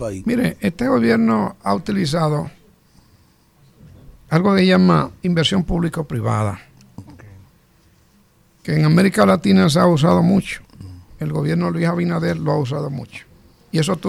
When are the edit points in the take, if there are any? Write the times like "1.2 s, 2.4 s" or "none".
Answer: 4.3 s